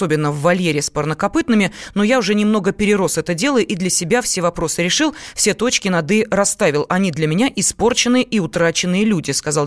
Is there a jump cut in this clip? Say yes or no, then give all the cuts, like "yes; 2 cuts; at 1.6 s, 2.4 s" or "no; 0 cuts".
no; 0 cuts